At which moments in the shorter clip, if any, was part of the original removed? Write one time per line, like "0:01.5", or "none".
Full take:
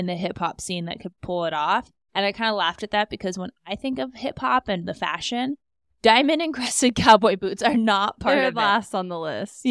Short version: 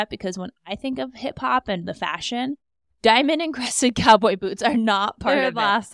none